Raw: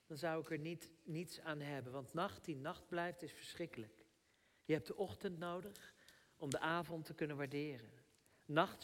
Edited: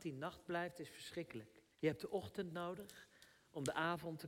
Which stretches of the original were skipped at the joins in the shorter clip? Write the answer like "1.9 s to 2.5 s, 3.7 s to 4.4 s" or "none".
4.2 s to 4.6 s